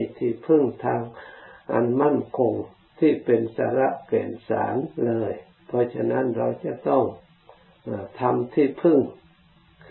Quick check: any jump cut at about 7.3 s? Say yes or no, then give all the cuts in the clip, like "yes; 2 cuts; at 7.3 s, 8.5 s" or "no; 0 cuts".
no; 1 cut; at 4.9 s